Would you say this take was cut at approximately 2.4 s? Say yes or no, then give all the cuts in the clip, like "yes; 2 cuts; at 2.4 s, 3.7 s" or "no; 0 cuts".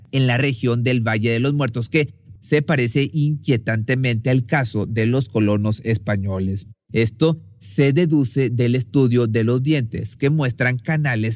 yes; 2 cuts; at 2.4 s, 6.9 s